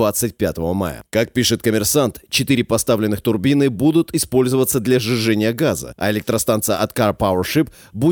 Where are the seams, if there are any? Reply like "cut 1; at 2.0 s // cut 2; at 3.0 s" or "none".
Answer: none

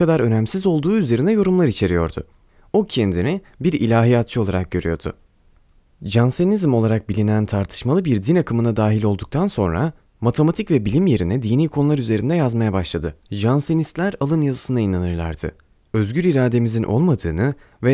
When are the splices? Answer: cut 1; at 13.2 s

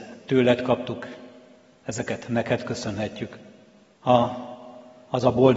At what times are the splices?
cut 1; at 3.9 s

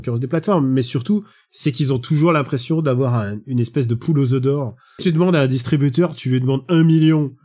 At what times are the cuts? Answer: cut 1; at 5.0 s

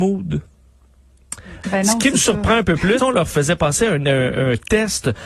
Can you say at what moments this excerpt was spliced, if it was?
cut 1; at 1.6 s // cut 2; at 3.0 s

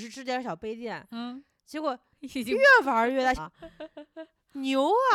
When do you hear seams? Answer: cut 1; at 3.4 s

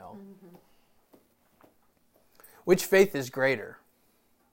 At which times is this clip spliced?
none

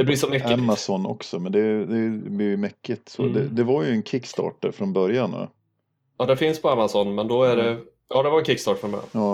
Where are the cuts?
none

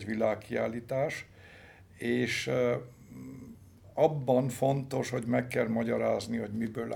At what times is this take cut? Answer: none

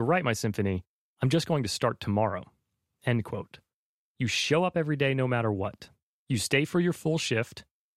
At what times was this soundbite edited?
cut 1; at 4.0 s

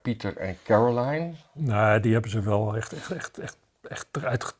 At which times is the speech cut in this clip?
none

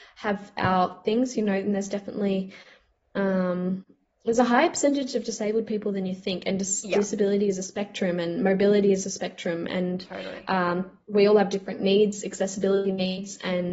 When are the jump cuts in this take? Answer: none

